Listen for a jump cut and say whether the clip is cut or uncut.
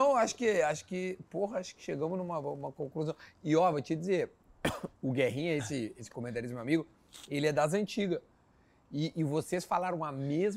uncut